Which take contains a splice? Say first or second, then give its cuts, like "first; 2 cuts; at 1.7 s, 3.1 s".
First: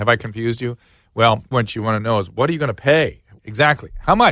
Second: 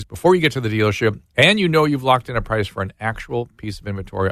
first; 2 cuts; at 1.5 s, 3.4 s